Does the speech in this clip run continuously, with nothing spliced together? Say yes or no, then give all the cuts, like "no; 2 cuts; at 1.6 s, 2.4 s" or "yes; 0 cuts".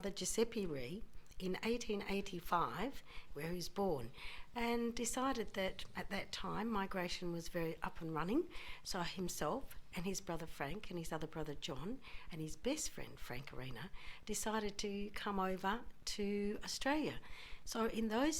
no; 1 cut; at 3.3 s